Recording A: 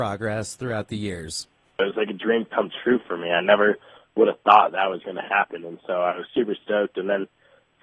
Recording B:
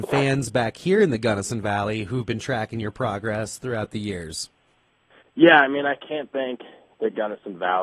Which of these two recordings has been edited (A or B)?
A